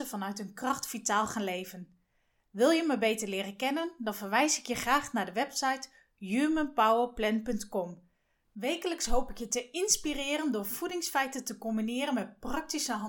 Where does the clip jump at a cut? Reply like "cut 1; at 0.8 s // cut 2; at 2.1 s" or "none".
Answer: cut 1; at 8.4 s